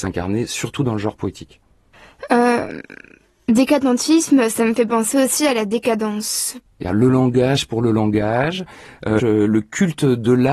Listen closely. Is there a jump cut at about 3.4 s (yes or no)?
no